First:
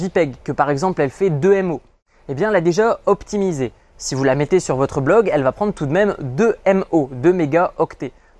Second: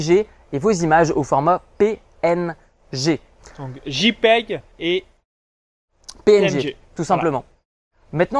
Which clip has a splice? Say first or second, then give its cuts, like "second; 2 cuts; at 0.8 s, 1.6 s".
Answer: second; 1 cut; at 4.7 s